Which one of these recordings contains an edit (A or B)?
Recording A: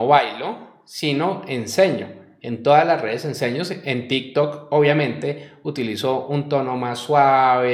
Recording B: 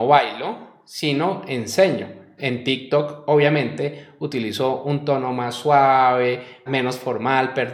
B